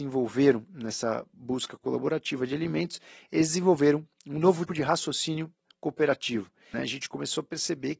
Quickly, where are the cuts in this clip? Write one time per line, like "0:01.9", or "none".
0:04.7
0:06.7